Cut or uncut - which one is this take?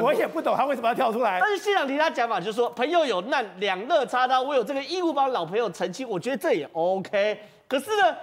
uncut